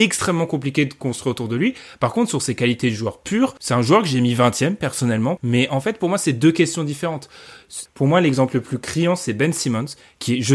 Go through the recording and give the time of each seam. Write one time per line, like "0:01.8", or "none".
0:03.6
0:05.4
0:07.9